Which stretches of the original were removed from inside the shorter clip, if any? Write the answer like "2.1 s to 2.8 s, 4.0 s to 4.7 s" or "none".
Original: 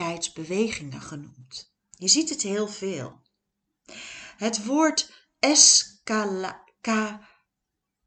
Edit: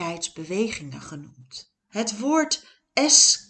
1.9 s to 4.4 s